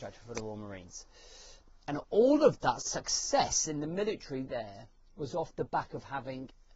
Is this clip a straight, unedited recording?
yes; 0 cuts

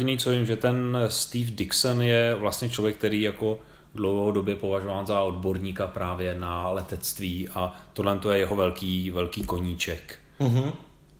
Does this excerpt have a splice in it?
no; 0 cuts

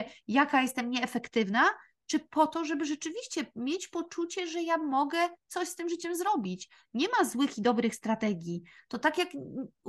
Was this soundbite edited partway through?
no; 0 cuts

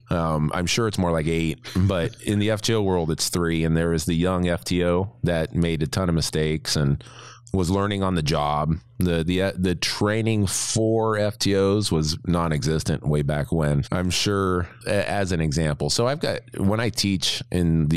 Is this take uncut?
no; 1 cut; at 13.8 s

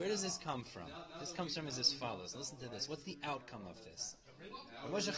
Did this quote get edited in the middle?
no; 0 cuts

